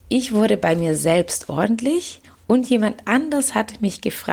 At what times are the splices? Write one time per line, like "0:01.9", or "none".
none